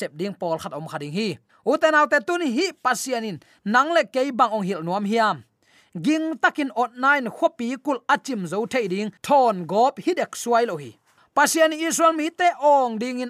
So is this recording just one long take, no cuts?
yes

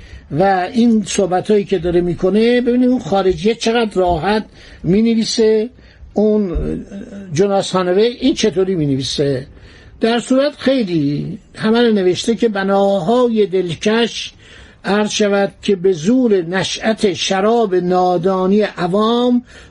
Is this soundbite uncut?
yes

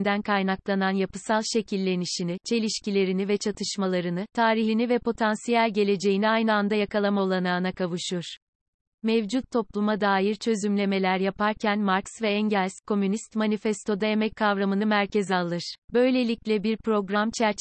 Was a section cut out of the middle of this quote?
yes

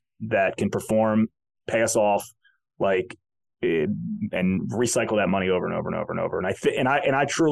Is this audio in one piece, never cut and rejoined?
yes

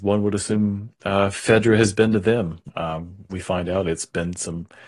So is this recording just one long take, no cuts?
yes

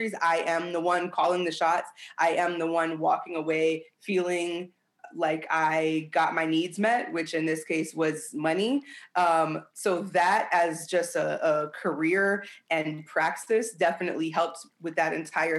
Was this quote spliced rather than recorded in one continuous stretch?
no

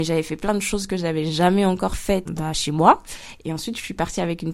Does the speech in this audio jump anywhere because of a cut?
yes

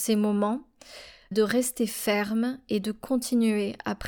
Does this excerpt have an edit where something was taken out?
yes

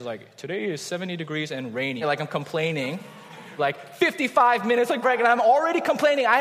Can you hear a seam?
yes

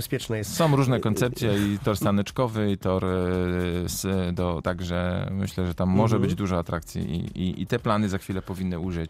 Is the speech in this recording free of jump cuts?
no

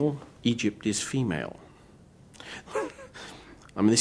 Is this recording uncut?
no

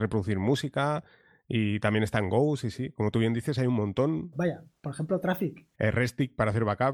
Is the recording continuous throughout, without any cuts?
no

